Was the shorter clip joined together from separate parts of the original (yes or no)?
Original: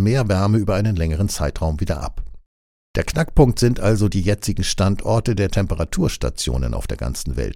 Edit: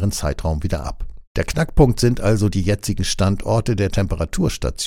yes